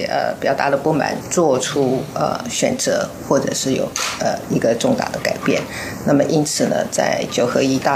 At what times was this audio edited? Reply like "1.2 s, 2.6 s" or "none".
1.2 s